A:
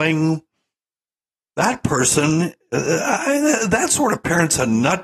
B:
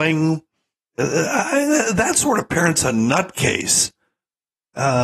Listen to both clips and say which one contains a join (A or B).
B